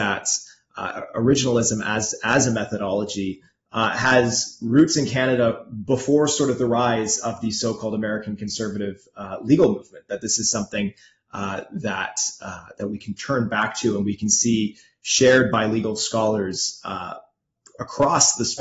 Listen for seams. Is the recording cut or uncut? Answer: uncut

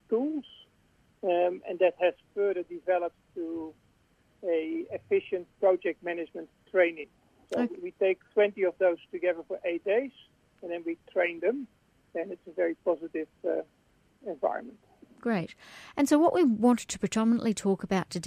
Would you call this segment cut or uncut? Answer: uncut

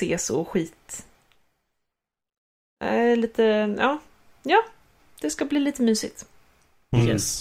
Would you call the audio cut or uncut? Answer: uncut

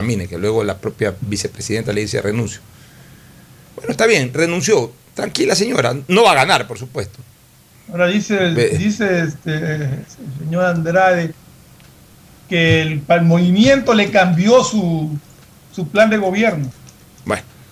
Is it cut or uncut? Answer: uncut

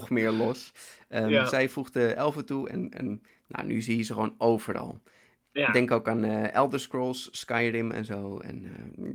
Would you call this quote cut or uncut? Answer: uncut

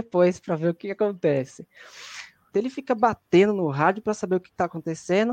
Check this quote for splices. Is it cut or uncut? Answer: cut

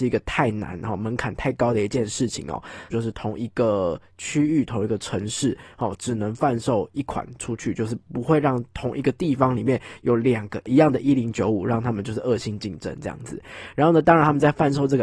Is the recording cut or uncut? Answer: cut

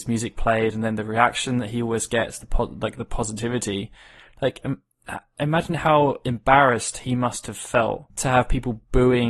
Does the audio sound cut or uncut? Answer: cut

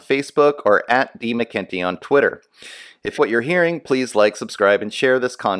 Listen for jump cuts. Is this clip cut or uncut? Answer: cut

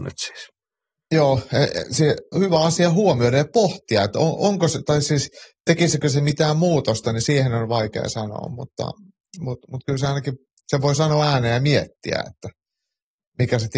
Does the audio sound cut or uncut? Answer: cut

